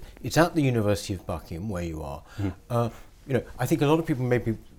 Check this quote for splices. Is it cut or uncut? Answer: uncut